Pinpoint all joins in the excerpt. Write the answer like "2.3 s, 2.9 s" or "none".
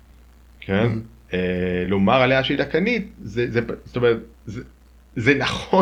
none

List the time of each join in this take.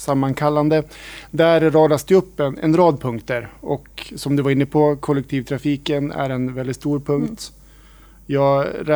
none

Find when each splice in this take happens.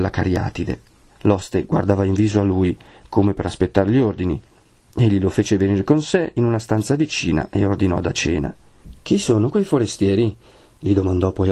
1.1 s

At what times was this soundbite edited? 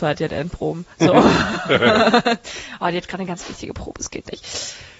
0.9 s

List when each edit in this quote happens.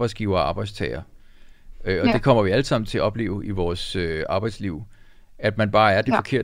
none

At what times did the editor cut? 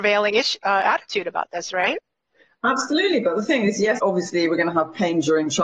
4.0 s

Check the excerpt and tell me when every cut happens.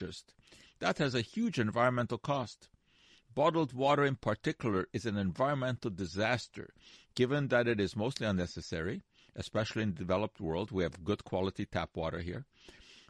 none

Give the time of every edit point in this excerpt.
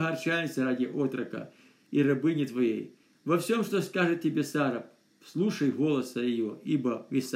none

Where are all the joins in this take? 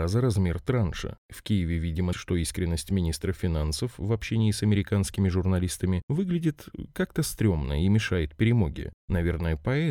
2.1 s

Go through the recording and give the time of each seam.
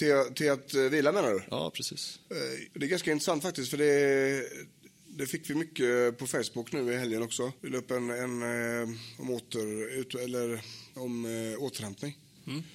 7.6 s

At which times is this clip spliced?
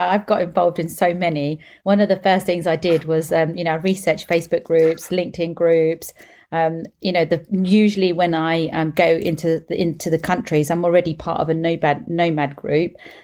none

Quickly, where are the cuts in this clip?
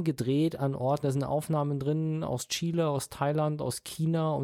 1.0 s

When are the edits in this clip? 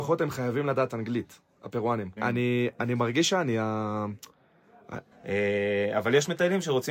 2.2 s, 5.1 s

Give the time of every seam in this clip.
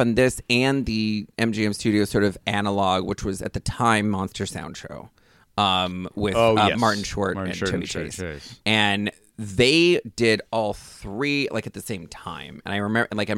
none

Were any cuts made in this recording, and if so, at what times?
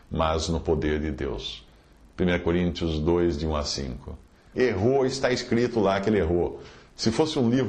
4.5 s

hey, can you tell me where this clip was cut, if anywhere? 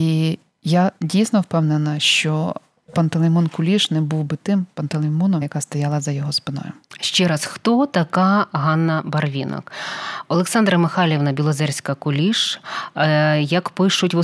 5.4 s

